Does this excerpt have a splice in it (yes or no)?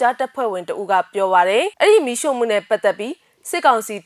yes